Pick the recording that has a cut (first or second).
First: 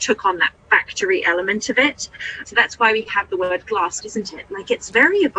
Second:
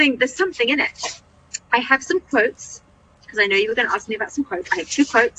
first